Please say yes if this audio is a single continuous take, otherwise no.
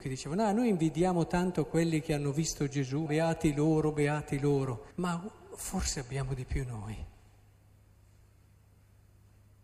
no